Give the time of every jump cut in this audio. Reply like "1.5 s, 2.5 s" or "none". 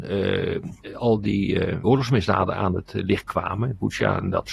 1.8 s